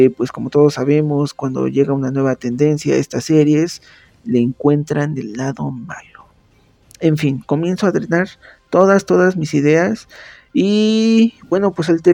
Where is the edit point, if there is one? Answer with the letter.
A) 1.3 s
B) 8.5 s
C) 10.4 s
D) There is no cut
D